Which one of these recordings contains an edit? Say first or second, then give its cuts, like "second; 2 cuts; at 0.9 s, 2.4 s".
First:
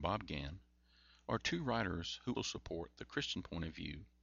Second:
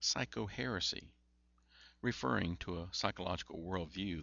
first; 1 cut; at 2.3 s